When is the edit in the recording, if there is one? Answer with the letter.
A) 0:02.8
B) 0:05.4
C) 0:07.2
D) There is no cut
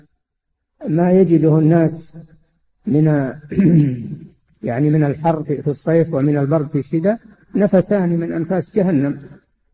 B